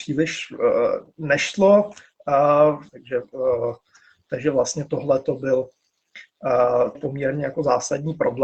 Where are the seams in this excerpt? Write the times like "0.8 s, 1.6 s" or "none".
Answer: 2.9 s, 7.0 s